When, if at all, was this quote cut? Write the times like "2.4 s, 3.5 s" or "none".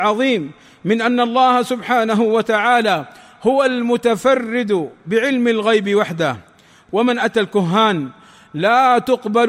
none